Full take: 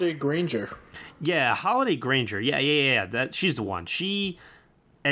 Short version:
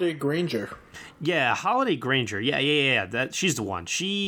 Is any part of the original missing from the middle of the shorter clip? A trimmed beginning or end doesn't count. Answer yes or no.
no